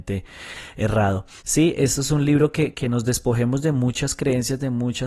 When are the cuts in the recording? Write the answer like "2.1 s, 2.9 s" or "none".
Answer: 1.4 s, 2.7 s

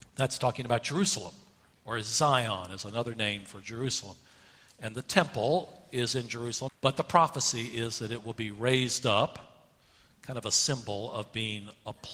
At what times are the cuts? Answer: 6.7 s

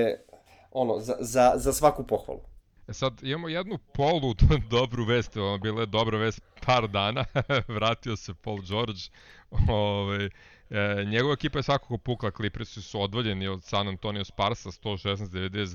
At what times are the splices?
2.8 s

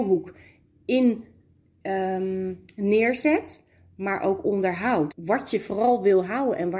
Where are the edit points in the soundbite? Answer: 5.1 s

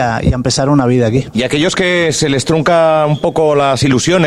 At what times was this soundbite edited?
1.3 s

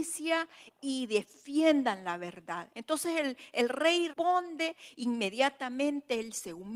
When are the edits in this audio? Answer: 2.7 s, 4.1 s

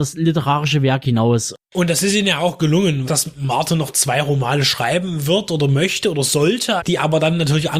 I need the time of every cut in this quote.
3.1 s, 6.8 s

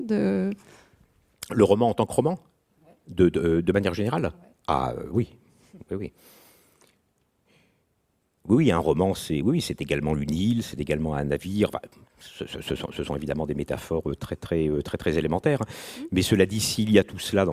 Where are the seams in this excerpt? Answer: none

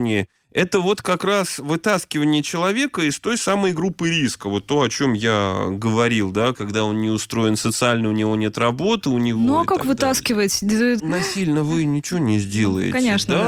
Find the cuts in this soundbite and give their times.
6.5 s, 11.0 s

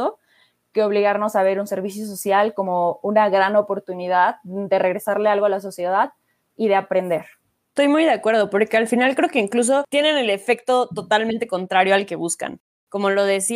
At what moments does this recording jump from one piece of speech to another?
none

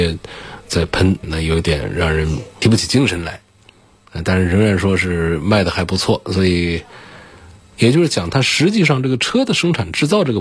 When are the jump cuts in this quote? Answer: 7.8 s

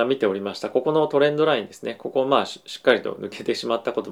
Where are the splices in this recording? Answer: none

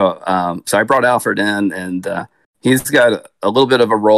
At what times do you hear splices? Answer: none

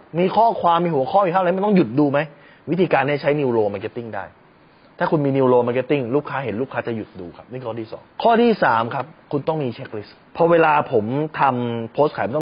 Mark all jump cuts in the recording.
10.3 s

